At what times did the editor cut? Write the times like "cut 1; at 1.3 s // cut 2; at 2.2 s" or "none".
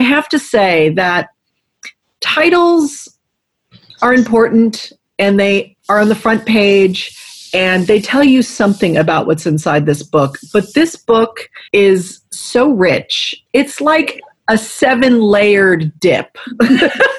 cut 1; at 11.7 s // cut 2; at 13.5 s